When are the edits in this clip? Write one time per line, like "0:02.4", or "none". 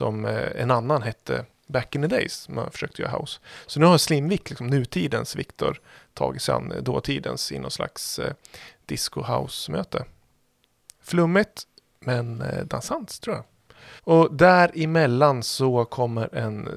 0:14.0